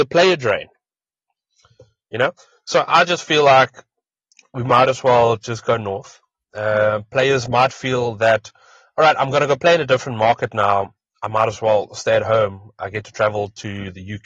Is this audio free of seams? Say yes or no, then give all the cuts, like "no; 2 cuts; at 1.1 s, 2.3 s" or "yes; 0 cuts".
yes; 0 cuts